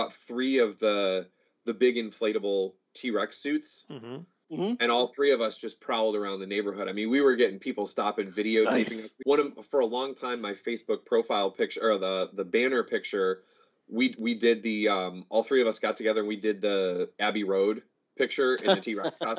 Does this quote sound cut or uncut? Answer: cut